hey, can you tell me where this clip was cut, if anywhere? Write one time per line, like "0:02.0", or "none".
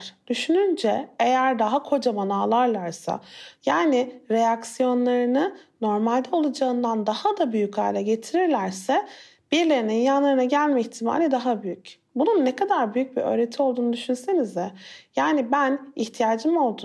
0:03.5